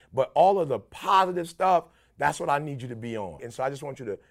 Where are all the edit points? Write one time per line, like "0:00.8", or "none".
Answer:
0:03.4